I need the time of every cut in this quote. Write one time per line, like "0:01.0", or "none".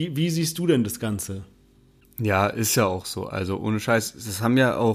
none